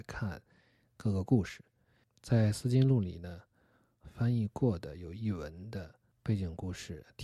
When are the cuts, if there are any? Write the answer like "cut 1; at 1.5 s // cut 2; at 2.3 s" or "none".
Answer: cut 1; at 4.0 s